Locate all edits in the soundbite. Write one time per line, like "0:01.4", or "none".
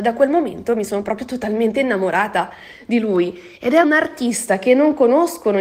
0:03.8